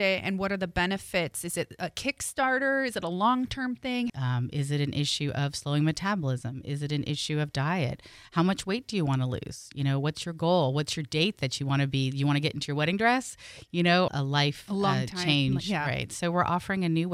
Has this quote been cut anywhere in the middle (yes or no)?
yes